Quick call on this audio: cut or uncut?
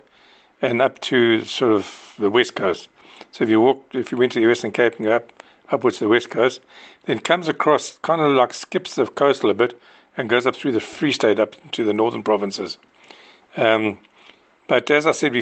uncut